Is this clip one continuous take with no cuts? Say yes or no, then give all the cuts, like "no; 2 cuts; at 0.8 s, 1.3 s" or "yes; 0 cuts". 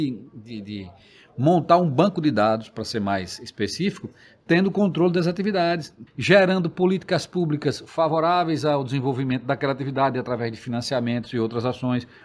no; 1 cut; at 6.1 s